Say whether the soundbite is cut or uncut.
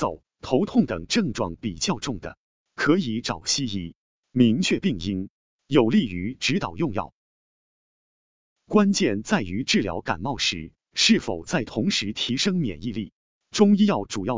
cut